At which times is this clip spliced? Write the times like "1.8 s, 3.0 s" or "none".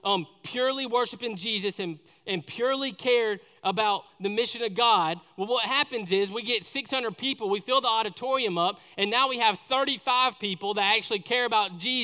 none